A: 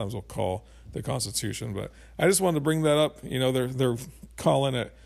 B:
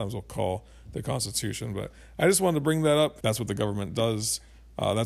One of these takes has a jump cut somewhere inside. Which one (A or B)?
B